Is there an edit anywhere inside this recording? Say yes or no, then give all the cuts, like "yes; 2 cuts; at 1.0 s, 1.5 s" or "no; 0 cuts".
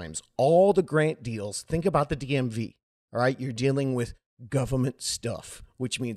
no; 0 cuts